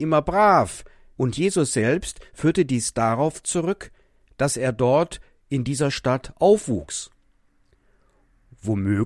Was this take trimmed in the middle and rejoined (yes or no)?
yes